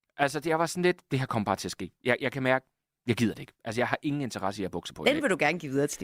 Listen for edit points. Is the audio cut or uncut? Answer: uncut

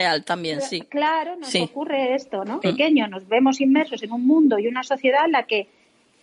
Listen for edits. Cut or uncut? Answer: cut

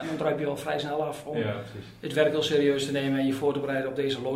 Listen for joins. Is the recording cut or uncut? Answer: uncut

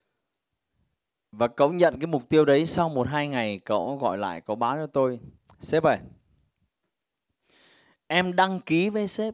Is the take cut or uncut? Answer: uncut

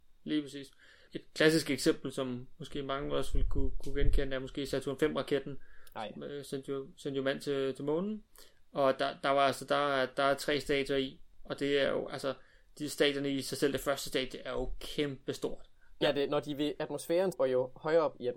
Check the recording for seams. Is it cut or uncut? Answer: cut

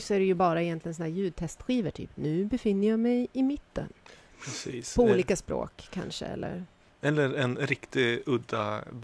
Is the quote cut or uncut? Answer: uncut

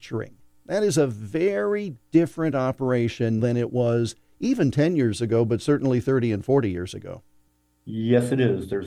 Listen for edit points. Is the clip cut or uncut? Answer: cut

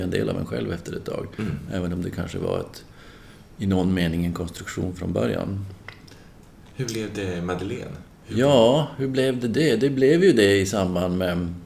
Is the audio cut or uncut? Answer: uncut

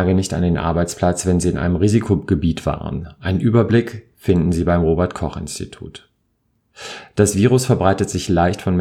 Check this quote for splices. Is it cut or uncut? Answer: uncut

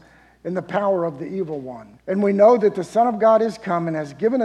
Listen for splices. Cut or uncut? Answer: cut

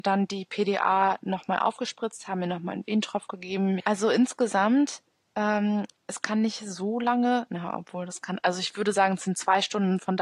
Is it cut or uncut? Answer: cut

